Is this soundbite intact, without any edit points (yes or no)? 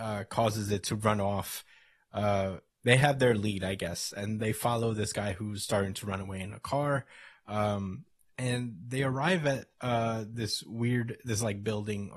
no